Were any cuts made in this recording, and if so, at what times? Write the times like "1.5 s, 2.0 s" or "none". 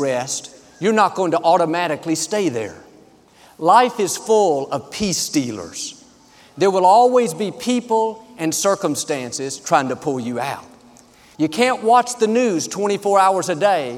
11.3 s